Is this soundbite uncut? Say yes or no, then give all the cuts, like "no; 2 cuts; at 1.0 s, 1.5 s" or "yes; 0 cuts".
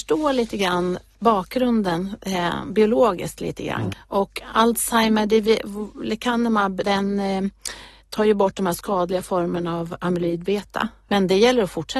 no; 3 cuts; at 3.9 s, 6.8 s, 11.1 s